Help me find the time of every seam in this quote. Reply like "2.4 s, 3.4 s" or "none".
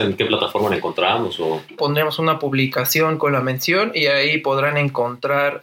1.8 s

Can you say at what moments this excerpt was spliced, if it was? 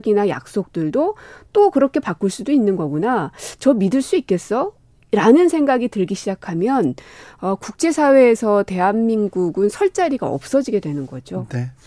none

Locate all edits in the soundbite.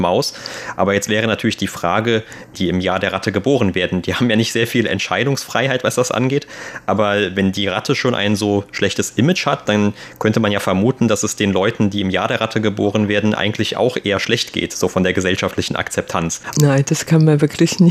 2.5 s, 16.5 s

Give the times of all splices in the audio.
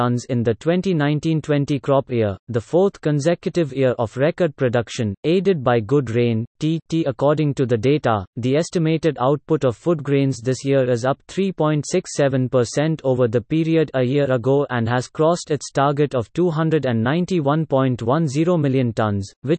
none

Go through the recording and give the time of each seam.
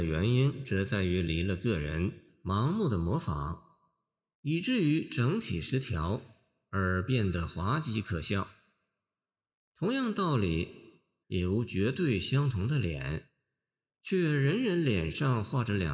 11.2 s

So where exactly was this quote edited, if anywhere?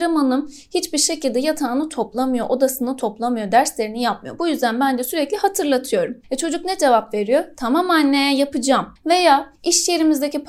9.0 s

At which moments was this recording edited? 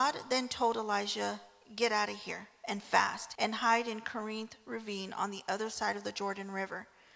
3.4 s

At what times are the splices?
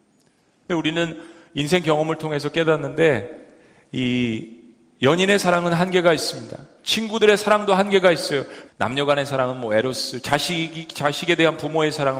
8.7 s, 10.2 s

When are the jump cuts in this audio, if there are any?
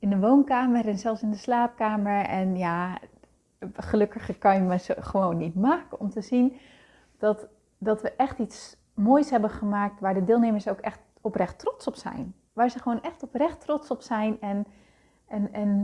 none

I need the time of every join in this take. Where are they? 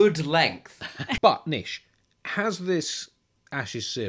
1.2 s

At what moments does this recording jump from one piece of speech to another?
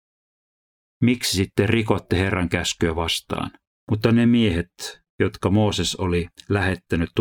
3.8 s

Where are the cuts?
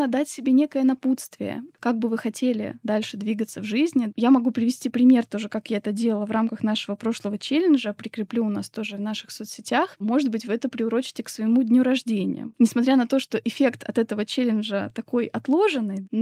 10.0 s

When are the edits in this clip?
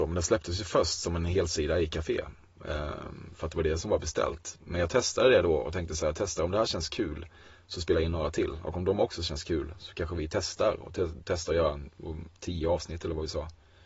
none

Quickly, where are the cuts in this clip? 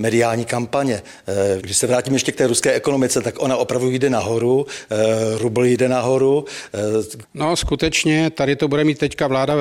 1.6 s, 7.2 s

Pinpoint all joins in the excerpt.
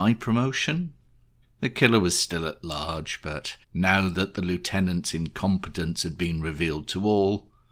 1.4 s, 3.6 s

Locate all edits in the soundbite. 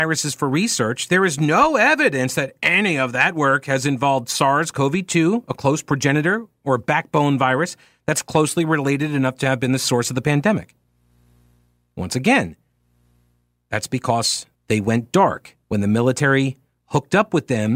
14.6 s, 15.6 s

